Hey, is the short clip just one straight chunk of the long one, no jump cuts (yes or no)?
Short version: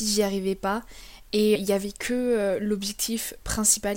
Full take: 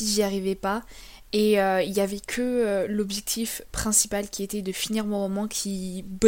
no